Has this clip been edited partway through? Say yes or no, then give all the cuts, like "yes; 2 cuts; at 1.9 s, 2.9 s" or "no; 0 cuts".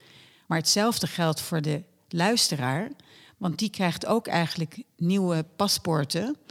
no; 0 cuts